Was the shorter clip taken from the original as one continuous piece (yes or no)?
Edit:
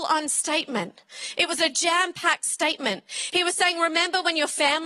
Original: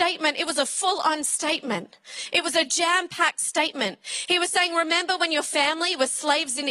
yes